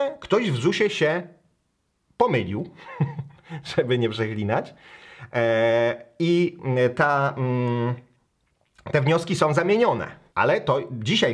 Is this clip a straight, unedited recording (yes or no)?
no